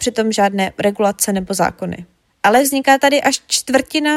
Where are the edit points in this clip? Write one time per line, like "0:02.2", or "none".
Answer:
0:02.2

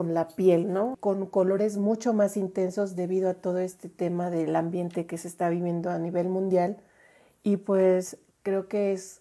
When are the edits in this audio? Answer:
0:00.9

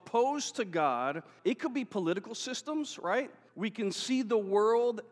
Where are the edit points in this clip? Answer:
0:01.4
0:03.5

